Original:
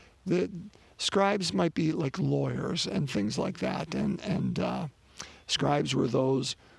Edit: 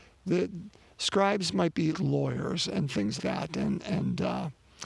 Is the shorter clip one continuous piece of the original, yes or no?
no